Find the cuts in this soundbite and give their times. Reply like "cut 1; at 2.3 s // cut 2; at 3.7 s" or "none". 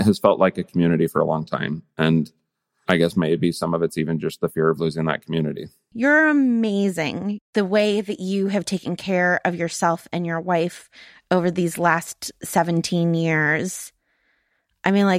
cut 1; at 5.9 s